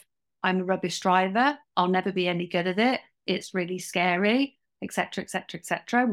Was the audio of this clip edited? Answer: no; 0 cuts

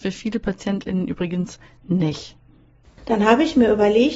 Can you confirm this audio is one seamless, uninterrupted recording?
no; 1 cut; at 2.9 s

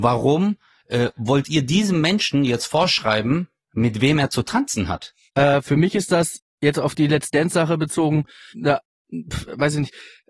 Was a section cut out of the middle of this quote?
yes; 2 cuts; at 5.3 s, 8.5 s

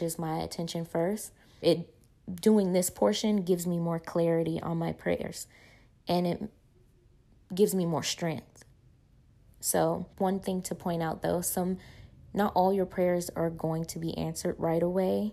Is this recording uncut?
no; 2 cuts; at 1.6 s, 10.1 s

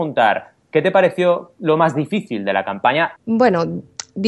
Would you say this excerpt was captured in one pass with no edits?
no; 1 cut; at 3.2 s

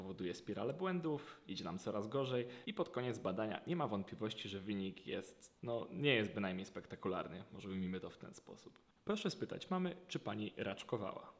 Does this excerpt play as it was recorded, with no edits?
no; 2 cuts; at 5.6 s, 9.0 s

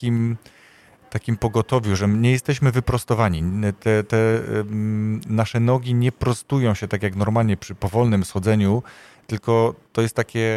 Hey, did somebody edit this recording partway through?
no; 0 cuts

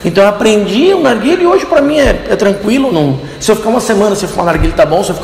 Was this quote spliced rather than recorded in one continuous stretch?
no; 0 cuts

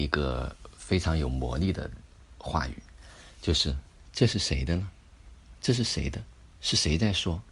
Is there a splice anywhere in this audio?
no; 0 cuts

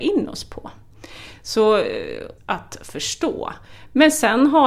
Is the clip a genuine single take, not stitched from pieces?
no; 1 cut; at 2.4 s

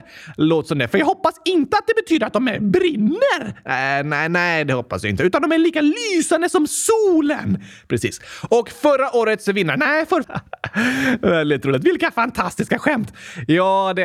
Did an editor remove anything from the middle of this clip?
yes; 1 cut; at 10.2 s

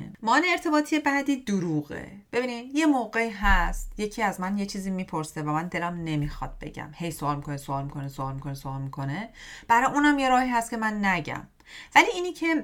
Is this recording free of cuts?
no; 1 cut; at 2.3 s

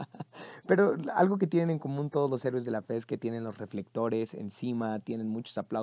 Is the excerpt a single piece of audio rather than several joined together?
yes; 0 cuts

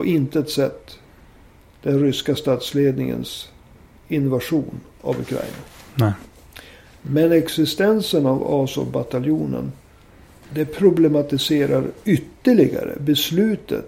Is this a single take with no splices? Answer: no; 1 cut; at 10.4 s

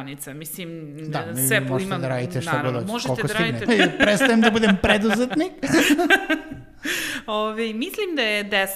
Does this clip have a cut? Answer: yes; 1 cut; at 3.7 s

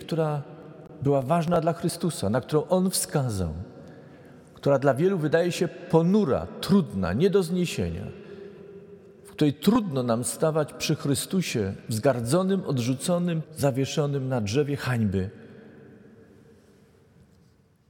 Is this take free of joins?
no; 1 cut; at 13.4 s

